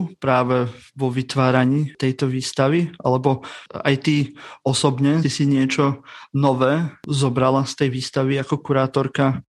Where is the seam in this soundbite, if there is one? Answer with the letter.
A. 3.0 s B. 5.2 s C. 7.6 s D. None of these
B